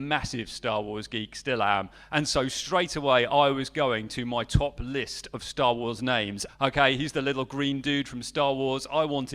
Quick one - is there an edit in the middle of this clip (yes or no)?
yes